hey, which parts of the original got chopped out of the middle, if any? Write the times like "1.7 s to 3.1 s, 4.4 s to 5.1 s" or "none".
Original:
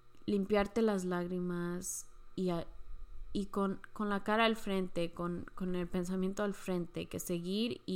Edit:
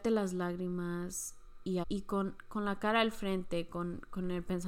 2.5 s to 3.3 s